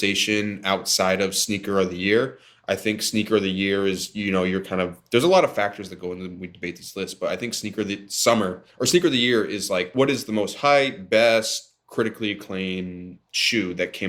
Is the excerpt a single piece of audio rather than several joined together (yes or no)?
yes